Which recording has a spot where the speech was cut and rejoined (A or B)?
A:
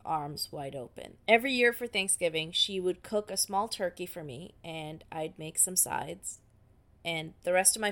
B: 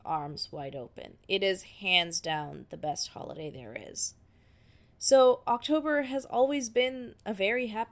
A